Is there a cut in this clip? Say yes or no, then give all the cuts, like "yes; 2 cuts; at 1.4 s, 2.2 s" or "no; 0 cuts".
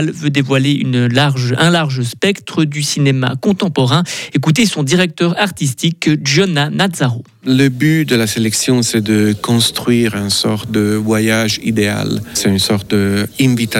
no; 0 cuts